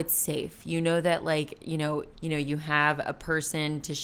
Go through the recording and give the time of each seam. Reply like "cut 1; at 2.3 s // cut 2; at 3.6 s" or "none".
cut 1; at 2.1 s